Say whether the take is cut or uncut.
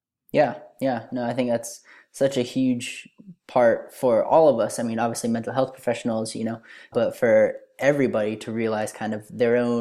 cut